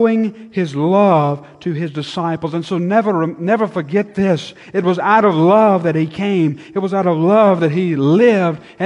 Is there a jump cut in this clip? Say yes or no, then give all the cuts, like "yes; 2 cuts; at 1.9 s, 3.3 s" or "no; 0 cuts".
no; 0 cuts